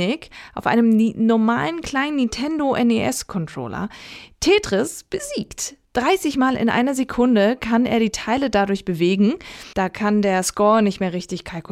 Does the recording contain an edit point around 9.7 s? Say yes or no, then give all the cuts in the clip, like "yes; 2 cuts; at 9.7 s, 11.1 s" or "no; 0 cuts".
yes; 1 cut; at 9.7 s